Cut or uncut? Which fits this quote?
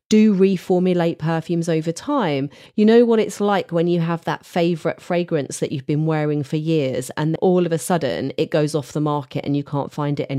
cut